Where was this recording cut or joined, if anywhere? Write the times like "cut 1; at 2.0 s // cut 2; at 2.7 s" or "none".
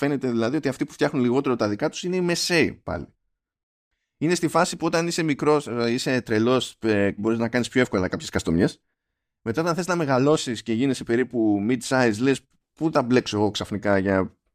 cut 1; at 7.2 s

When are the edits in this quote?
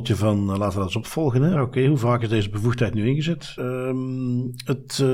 cut 1; at 1.6 s // cut 2; at 3.6 s

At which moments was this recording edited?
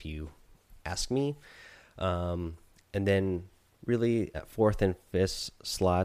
cut 1; at 4.3 s

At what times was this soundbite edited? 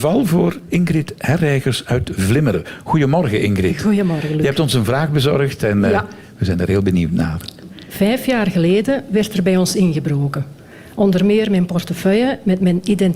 none

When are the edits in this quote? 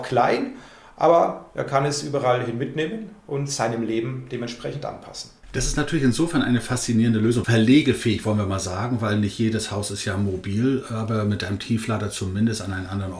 cut 1; at 7.4 s

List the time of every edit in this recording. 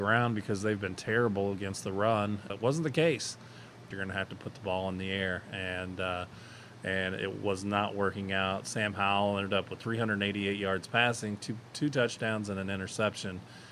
cut 1; at 2.5 s // cut 2; at 3.9 s

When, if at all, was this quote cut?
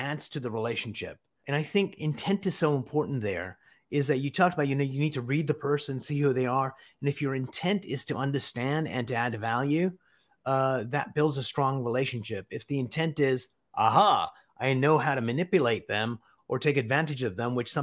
cut 1; at 1.4 s

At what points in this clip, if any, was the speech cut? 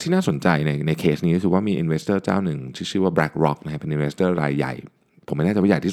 none

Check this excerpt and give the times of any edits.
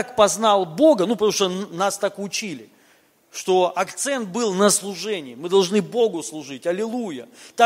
none

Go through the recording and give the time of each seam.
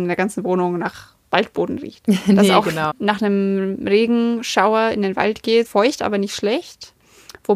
cut 1; at 2.9 s // cut 2; at 5.6 s

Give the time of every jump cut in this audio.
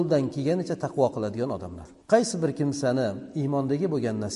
cut 1; at 2.0 s

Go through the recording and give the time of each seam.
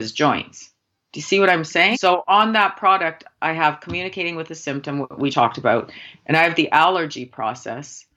cut 1; at 1.9 s // cut 2; at 5.3 s

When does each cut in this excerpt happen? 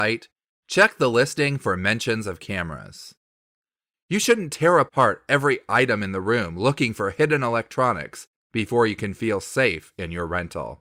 cut 1; at 3.9 s

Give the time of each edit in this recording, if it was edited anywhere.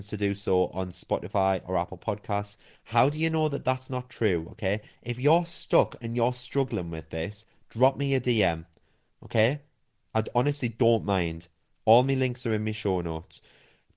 cut 1; at 2.7 s

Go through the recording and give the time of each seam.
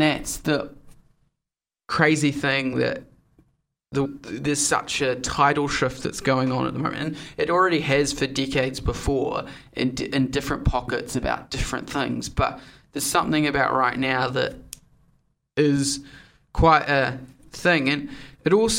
cut 1; at 4.0 s

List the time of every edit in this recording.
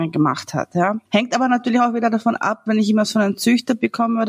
cut 1; at 1.1 s // cut 2; at 2.7 s

